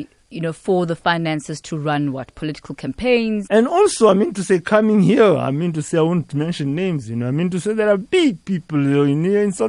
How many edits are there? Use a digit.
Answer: 1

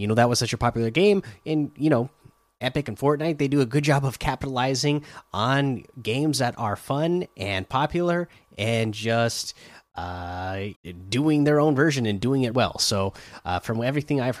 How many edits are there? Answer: 2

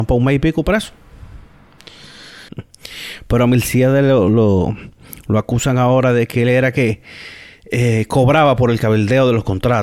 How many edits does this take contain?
1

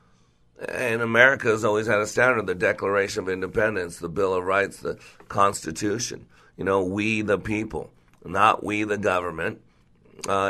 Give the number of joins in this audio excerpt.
0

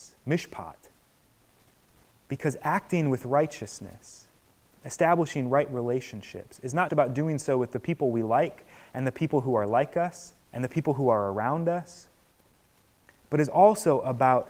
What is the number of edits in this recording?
2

